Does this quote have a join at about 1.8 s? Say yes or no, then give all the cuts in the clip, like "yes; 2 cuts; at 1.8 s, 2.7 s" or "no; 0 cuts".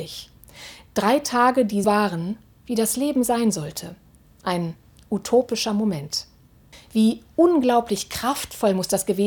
yes; 2 cuts; at 1.8 s, 6.7 s